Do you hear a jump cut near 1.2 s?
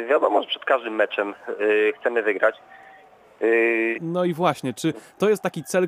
no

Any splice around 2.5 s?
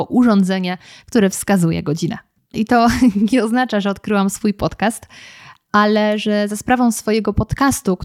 yes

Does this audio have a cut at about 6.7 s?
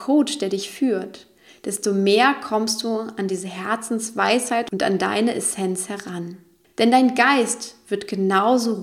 no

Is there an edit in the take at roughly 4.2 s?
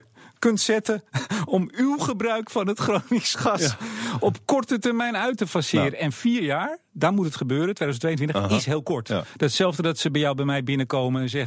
no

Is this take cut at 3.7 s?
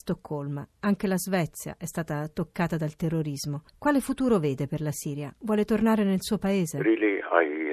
yes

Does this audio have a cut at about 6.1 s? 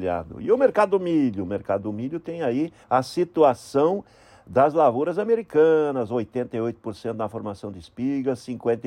no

